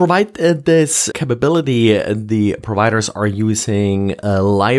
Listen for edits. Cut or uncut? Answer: cut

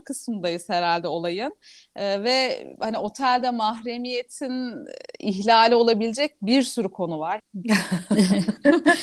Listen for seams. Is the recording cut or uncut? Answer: cut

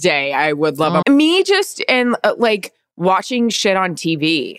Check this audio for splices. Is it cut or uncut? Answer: cut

